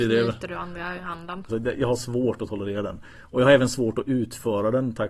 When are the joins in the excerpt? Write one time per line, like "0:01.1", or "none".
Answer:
0:01.5